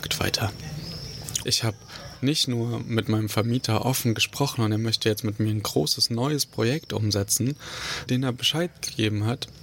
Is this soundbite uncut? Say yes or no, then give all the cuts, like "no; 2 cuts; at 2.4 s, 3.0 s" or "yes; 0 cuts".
no; 2 cuts; at 1.4 s, 8.1 s